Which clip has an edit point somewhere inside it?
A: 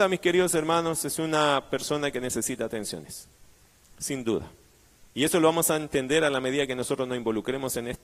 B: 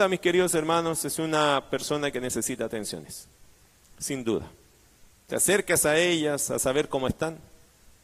B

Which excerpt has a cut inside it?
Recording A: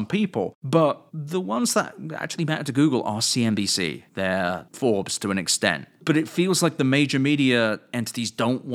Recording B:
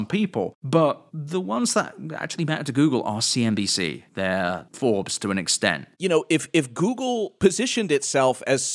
B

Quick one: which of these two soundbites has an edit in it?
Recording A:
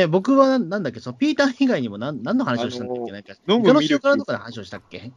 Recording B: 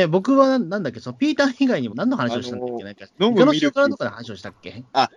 B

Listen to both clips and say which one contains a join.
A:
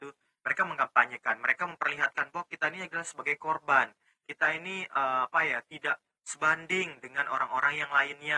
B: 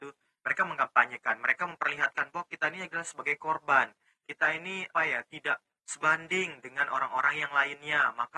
B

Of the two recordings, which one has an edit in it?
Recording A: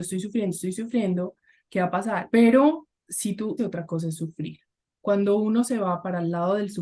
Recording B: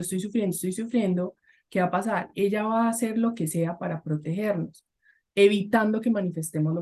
A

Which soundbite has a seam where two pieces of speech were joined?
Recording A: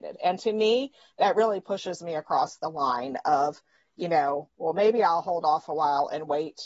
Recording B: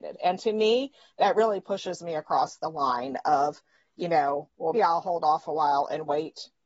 B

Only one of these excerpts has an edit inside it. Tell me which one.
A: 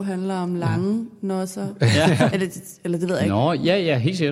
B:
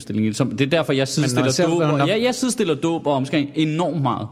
A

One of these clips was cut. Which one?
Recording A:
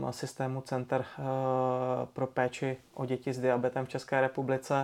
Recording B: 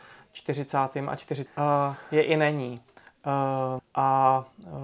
B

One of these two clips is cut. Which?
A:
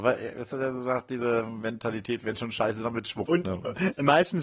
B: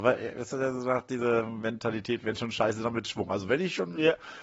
A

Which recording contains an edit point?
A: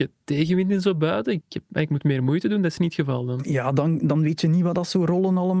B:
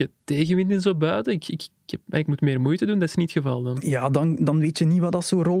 A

